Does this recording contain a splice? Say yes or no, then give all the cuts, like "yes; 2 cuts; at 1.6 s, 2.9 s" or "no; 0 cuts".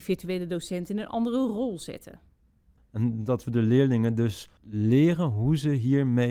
yes; 2 cuts; at 2.8 s, 4.6 s